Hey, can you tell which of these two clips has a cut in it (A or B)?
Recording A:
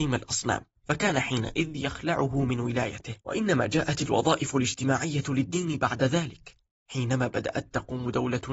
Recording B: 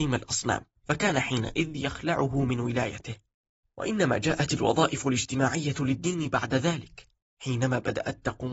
A